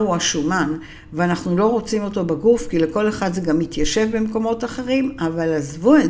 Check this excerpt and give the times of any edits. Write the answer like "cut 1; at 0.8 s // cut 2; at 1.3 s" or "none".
none